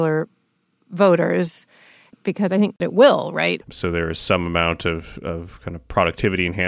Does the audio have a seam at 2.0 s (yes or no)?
no